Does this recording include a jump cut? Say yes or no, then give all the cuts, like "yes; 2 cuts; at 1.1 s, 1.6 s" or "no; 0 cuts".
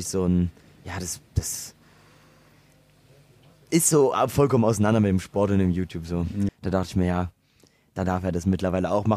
yes; 1 cut; at 6.5 s